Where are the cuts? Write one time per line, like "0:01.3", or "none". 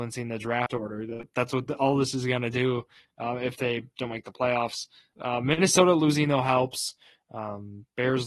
0:05.1